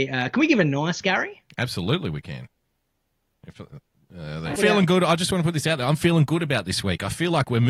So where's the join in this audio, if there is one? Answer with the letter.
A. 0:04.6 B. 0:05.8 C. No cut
A